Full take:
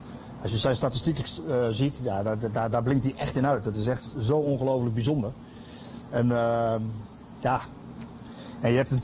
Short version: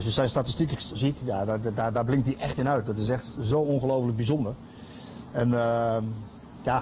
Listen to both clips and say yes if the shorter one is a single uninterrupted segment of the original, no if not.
no